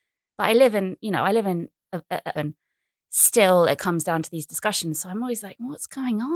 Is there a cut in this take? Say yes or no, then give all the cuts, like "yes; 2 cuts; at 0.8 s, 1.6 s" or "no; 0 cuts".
yes; 1 cut; at 2.3 s